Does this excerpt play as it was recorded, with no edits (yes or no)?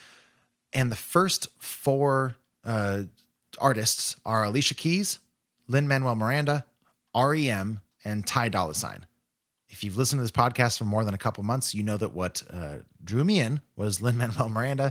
yes